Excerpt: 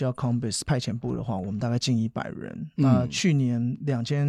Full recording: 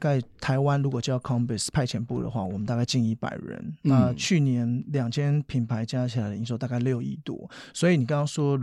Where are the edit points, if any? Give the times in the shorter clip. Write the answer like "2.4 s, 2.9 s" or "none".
none